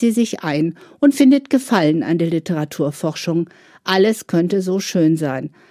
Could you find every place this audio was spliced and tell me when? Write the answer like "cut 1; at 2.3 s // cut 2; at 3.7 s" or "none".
none